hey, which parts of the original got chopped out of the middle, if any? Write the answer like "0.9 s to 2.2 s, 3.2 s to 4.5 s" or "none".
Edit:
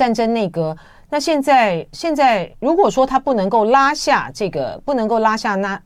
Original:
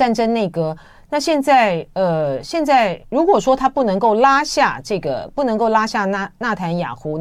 1.9 s to 2.4 s